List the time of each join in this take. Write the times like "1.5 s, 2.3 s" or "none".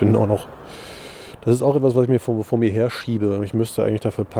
none